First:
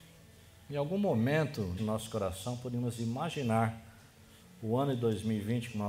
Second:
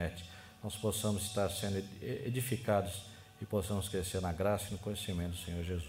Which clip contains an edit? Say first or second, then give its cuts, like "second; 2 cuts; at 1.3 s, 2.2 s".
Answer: first; 1 cut; at 1.8 s